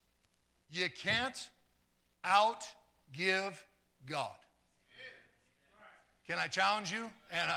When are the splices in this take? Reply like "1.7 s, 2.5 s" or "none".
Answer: none